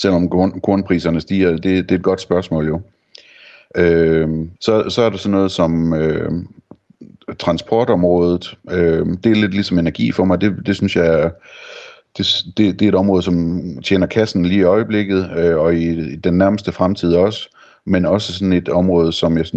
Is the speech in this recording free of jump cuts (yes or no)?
no